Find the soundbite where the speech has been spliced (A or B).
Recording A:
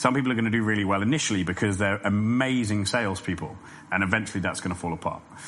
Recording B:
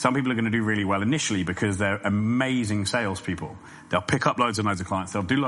A